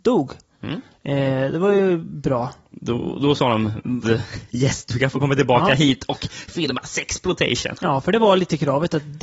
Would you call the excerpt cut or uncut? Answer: cut